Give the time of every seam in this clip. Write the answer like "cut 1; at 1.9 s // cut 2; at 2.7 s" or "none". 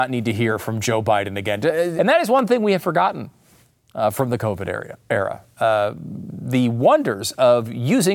cut 1; at 2.0 s